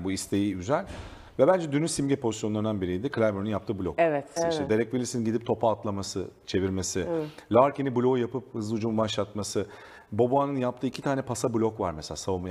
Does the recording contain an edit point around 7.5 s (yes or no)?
no